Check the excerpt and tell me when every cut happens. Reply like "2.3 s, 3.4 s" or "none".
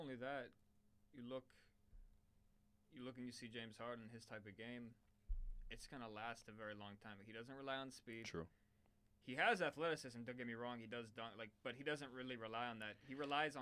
none